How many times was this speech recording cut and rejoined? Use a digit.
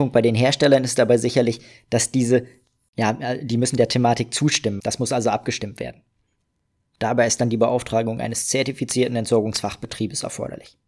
2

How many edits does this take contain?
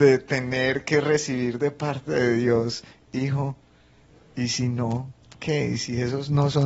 0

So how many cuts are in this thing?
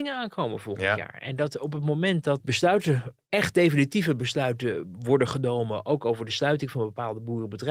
1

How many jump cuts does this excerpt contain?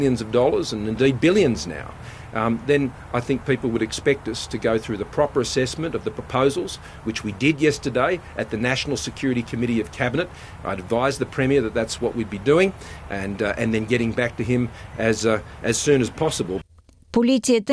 0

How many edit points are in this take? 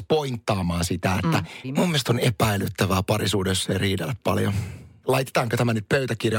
2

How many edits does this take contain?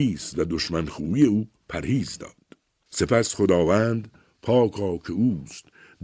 1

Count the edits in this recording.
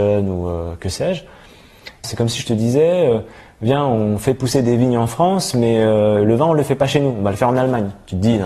1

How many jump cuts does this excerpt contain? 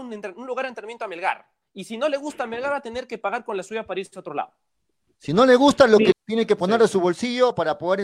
1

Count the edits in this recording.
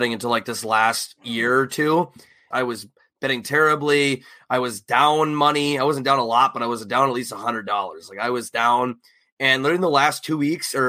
1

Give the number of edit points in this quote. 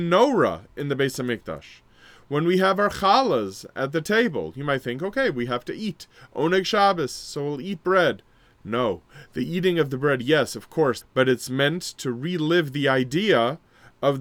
1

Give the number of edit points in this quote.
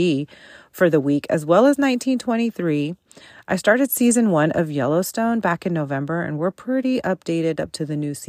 0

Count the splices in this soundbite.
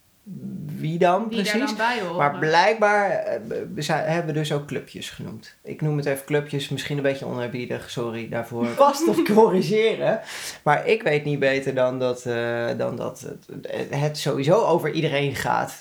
1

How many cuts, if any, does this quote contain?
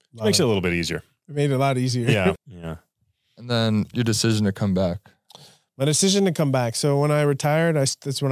1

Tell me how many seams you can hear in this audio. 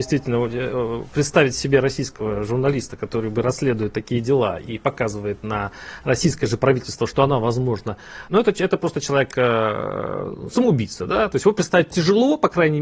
1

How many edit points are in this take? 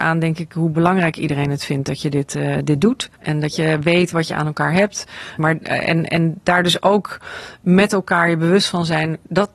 2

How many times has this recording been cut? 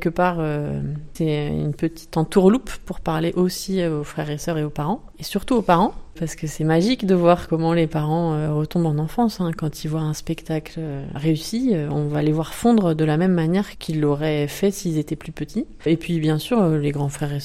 1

